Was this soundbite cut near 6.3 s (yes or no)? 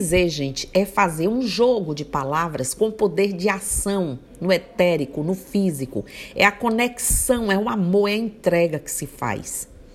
no